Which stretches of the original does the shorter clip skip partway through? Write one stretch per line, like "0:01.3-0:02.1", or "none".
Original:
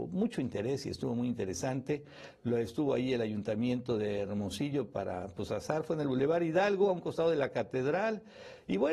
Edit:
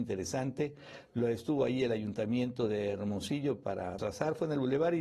0:05.3-0:05.5